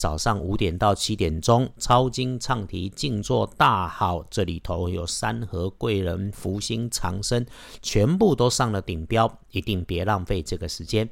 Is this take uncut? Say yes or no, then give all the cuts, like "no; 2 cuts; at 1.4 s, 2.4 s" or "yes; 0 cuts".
yes; 0 cuts